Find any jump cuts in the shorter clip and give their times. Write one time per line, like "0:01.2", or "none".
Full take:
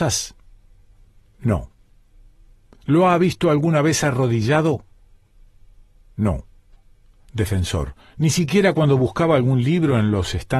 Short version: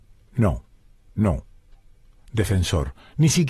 0:01.1